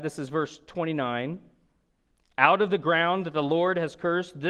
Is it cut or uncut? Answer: uncut